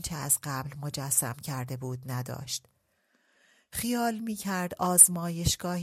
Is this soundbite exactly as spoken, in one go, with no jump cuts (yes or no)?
yes